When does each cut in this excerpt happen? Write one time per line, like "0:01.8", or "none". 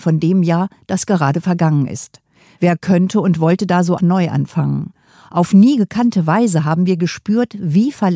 0:04.0